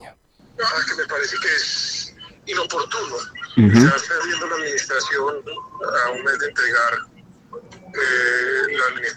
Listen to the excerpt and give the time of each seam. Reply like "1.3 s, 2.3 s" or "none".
2.4 s